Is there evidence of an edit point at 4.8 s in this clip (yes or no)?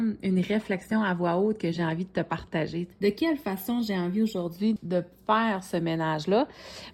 yes